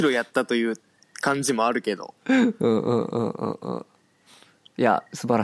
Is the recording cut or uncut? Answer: cut